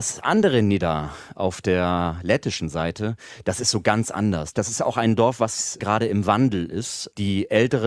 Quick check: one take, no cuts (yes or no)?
no